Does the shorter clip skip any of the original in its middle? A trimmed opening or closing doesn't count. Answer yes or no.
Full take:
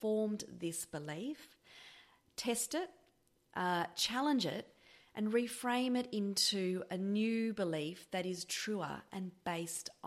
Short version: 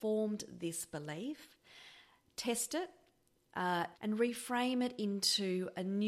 yes